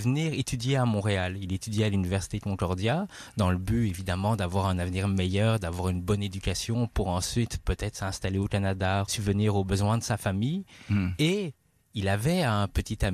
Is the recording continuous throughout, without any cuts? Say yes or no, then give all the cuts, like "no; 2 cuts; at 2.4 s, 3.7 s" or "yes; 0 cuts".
no; 1 cut; at 9.1 s